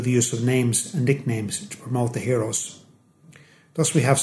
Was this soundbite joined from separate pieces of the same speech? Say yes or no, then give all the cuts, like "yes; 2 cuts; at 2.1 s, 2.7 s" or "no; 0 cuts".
no; 0 cuts